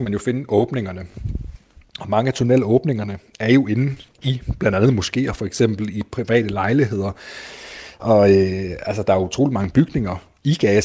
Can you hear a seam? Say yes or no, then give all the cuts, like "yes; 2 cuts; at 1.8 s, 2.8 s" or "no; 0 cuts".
no; 0 cuts